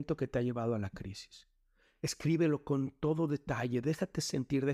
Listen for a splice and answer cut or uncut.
uncut